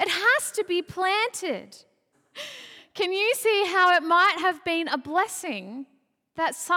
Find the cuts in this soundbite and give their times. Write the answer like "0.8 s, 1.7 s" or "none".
2.1 s